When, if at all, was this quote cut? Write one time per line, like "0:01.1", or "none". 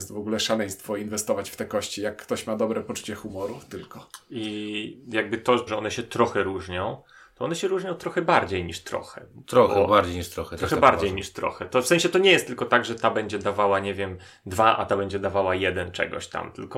0:05.7